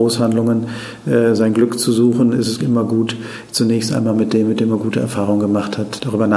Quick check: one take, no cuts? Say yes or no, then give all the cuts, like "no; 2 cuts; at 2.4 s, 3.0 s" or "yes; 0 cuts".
no; 1 cut; at 2.6 s